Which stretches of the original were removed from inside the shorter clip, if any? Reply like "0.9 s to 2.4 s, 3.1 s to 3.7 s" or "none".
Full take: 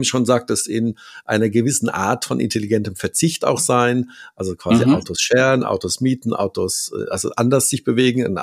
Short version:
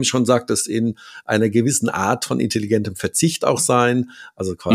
none